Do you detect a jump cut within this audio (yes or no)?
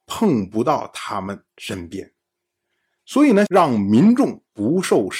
yes